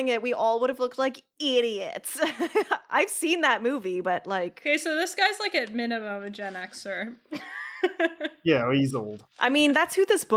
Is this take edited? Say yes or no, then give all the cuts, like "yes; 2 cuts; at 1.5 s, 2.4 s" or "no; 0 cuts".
no; 0 cuts